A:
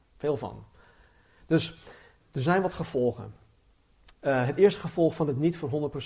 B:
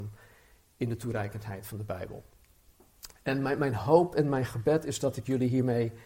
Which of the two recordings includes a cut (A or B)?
A